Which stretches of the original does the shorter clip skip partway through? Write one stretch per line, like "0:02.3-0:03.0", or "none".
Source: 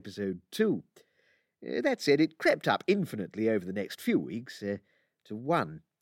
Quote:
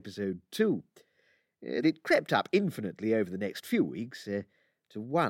0:01.8-0:02.2